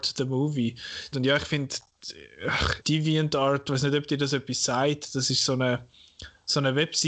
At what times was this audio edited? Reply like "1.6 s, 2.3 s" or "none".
1.1 s, 2.8 s